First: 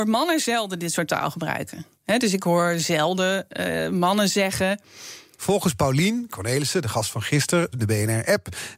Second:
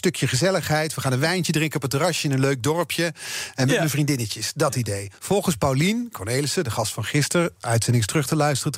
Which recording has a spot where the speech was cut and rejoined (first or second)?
first